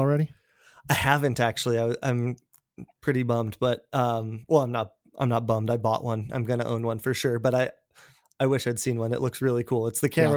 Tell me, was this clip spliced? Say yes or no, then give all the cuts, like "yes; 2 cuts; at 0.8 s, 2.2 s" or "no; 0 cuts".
no; 0 cuts